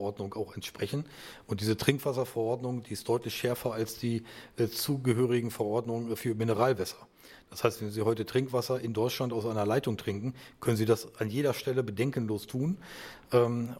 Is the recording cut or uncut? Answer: uncut